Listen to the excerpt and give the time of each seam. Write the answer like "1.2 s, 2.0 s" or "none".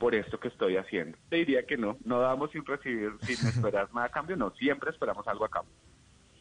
1.3 s